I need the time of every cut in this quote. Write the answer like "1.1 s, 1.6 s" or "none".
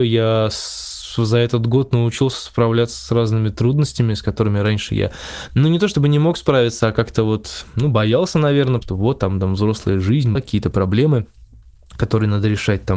8.8 s, 10.4 s